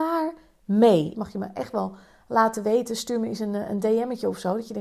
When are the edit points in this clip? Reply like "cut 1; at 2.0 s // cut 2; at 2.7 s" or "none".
cut 1; at 1.1 s